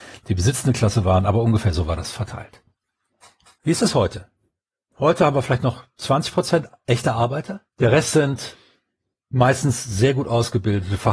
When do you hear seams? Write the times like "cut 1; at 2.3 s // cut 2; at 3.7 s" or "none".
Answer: cut 1; at 3.6 s // cut 2; at 7.7 s